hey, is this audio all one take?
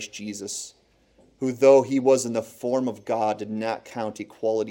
yes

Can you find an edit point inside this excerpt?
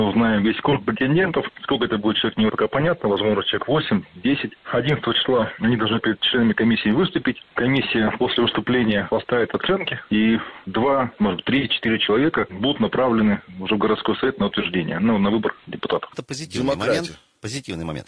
yes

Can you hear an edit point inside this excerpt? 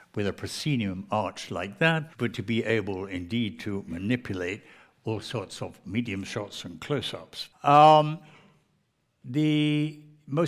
yes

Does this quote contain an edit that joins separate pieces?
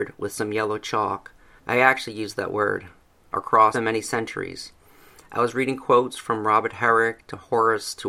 yes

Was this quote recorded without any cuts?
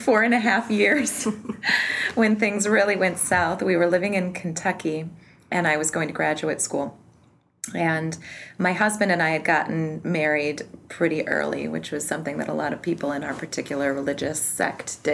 yes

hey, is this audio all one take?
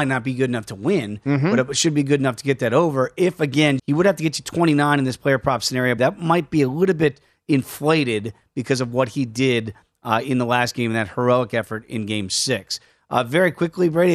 no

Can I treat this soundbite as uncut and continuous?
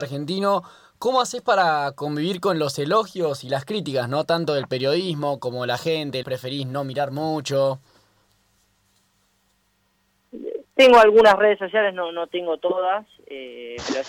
no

